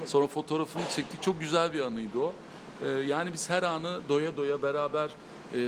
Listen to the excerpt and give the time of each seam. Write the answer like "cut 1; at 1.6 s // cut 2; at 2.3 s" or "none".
none